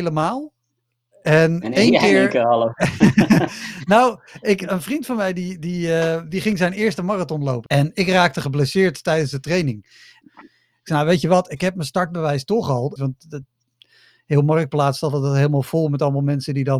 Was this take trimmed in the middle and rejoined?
yes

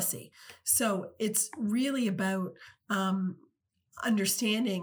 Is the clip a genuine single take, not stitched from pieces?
yes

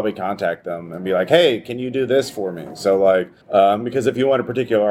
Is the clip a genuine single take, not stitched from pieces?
no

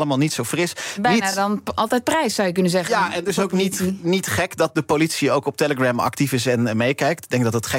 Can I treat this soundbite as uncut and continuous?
yes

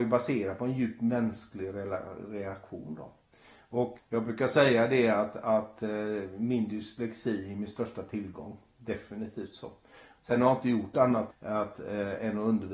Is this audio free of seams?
no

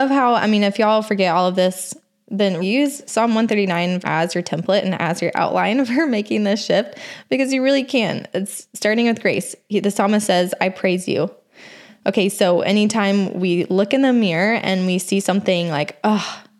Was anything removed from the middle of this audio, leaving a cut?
yes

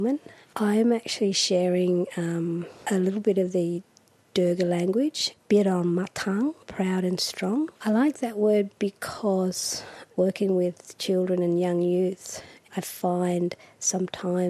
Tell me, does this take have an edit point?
yes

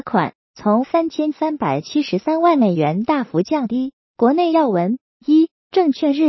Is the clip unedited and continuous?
yes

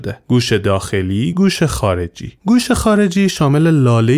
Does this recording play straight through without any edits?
no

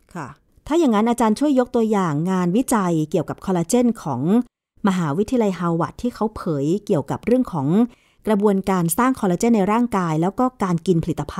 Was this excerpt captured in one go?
yes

